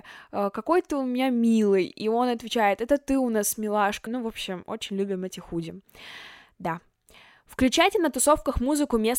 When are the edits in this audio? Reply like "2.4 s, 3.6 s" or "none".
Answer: 4.1 s

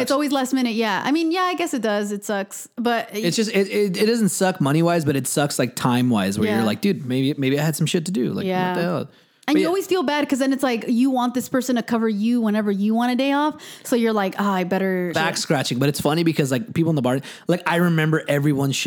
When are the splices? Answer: 15.1 s

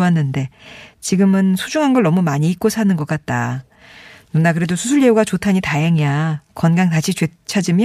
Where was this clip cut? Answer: none

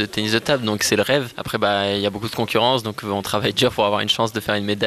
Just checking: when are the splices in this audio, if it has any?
none

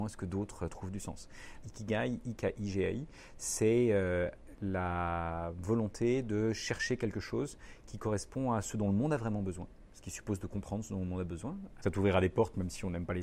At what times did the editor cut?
1.6 s, 11.8 s

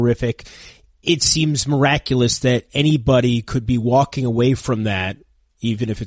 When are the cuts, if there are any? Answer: 1.0 s

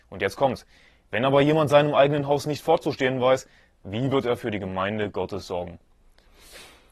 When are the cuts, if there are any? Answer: none

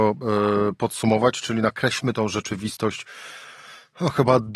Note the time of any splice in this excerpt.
none

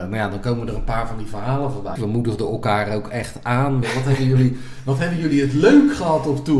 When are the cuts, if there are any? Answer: 2.0 s, 3.8 s

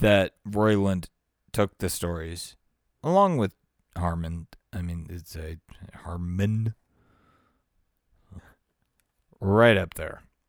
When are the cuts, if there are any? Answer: 8.4 s

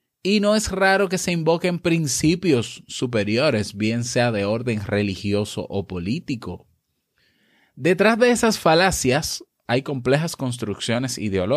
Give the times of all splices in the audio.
9.7 s

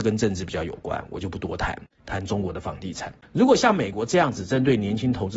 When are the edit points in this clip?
2.0 s, 3.2 s

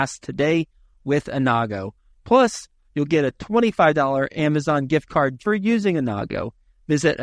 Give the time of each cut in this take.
5.4 s

